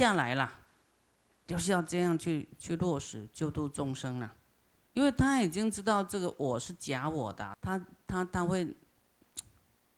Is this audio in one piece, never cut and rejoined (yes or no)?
yes